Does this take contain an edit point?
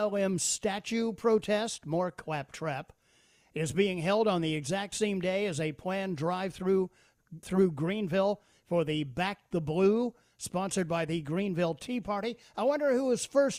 yes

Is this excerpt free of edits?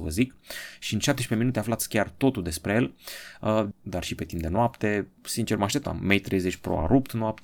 no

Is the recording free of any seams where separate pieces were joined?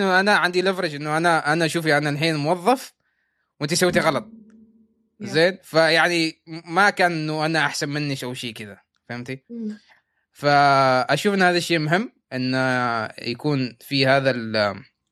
yes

